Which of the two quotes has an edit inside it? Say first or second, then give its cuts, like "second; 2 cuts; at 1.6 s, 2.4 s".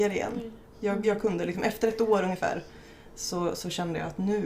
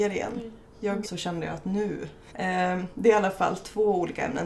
second; 2 cuts; at 1.0 s, 2.3 s